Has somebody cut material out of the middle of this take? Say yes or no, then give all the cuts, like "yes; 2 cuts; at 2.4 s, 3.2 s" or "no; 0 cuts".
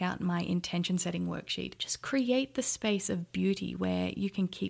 yes; 1 cut; at 1.8 s